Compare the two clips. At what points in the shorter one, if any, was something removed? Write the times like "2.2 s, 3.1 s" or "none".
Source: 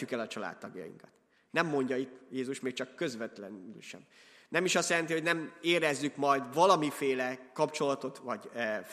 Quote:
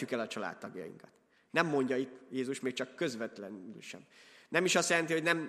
none